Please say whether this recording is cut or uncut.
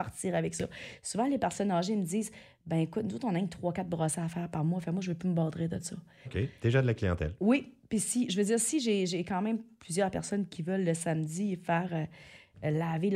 cut